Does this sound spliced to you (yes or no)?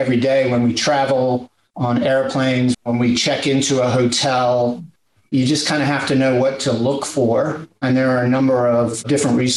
yes